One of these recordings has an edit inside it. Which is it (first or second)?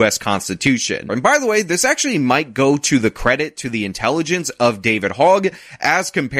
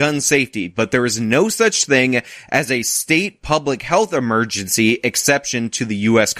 first